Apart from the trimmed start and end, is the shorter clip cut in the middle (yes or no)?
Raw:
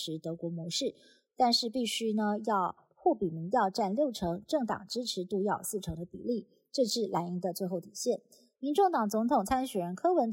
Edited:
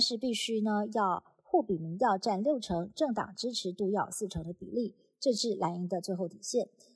no